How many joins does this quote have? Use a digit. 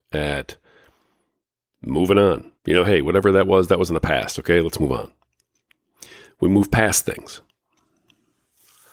1